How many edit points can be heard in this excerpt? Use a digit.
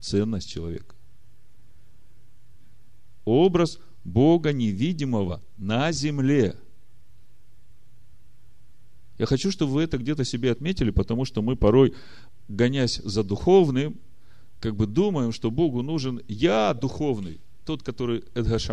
1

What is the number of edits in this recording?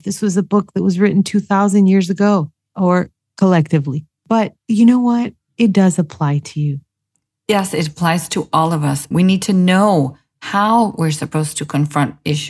1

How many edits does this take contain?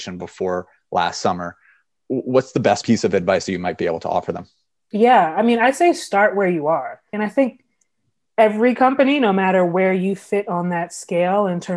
1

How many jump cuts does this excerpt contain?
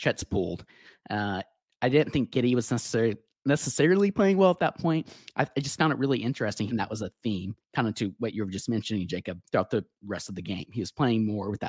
1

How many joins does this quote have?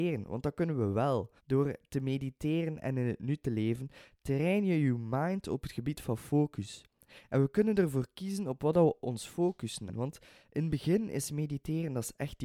2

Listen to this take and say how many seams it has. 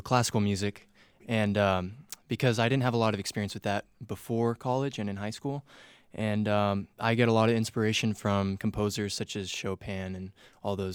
1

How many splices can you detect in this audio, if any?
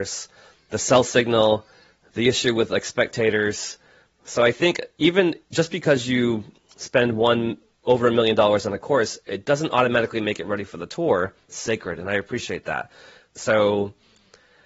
2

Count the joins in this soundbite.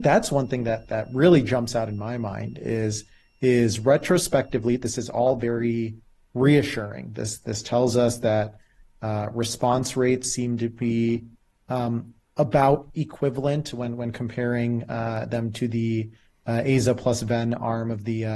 0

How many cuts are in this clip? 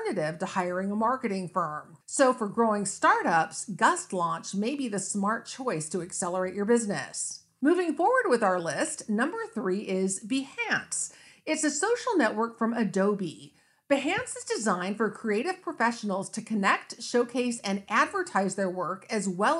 0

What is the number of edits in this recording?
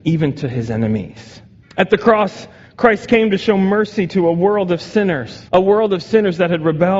2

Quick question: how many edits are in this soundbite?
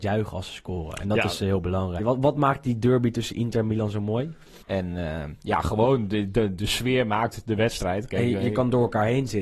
2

